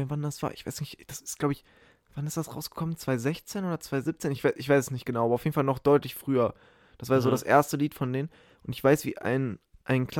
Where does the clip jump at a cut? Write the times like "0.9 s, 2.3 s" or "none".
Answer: none